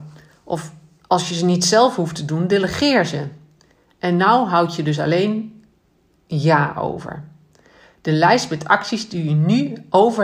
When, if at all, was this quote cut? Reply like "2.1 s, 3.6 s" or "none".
none